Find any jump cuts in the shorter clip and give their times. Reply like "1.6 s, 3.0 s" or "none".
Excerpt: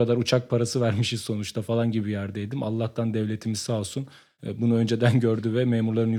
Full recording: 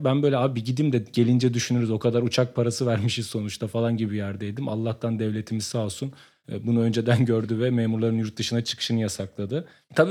none

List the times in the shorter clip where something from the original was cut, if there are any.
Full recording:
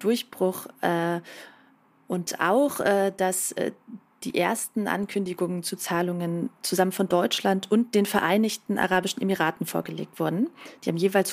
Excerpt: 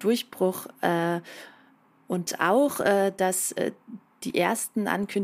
none

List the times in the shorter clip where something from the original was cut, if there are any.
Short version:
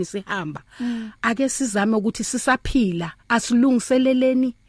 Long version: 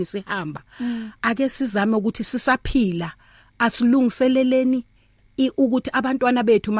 3.2 s

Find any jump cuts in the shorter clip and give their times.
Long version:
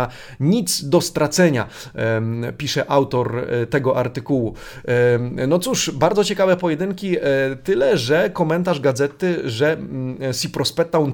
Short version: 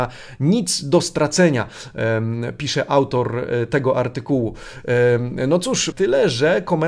5.9 s

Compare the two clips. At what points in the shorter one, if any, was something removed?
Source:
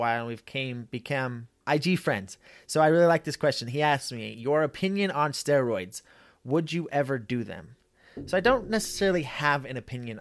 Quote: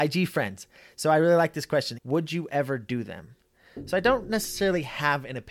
1.9 s

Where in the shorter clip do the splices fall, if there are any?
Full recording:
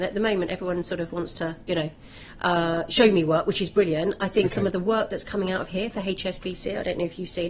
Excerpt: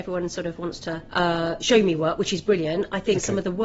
1.1 s

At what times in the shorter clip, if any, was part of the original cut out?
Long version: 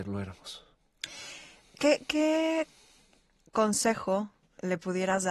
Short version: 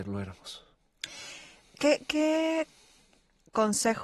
none

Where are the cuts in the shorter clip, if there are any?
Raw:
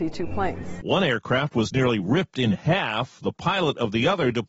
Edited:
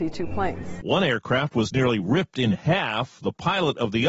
none

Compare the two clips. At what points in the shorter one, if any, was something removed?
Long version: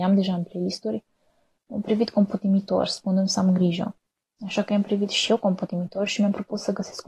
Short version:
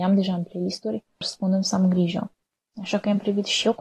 1.2 s

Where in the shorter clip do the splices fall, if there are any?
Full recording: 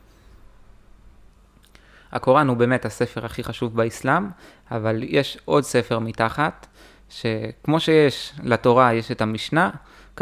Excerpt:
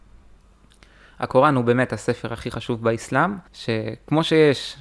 3.5 s

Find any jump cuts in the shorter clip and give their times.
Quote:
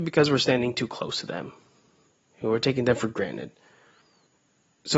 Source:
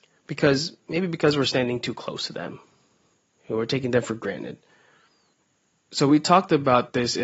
none

